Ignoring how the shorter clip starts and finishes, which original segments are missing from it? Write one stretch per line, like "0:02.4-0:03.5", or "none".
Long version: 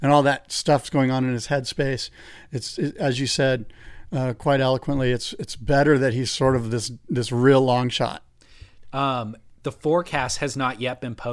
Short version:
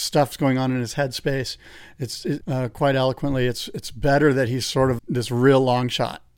0:02.9-0:04.1
0:06.6-0:07.0